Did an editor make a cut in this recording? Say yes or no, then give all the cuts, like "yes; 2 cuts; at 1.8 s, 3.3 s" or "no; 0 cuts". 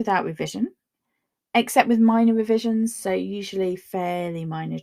no; 0 cuts